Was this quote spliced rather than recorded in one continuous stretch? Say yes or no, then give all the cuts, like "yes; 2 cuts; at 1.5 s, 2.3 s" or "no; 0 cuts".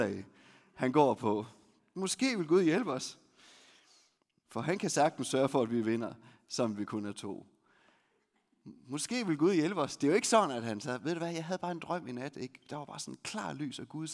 yes; 1 cut; at 4.4 s